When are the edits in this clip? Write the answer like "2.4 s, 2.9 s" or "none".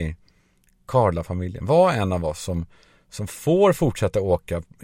none